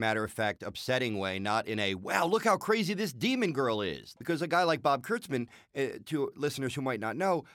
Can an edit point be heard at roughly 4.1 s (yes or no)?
yes